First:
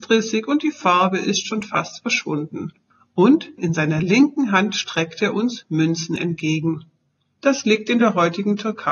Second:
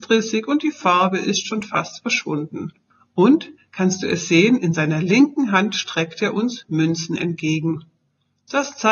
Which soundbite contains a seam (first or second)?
first